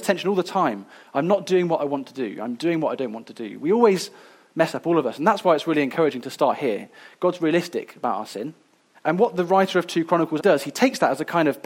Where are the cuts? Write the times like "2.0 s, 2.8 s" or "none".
8.9 s, 10.4 s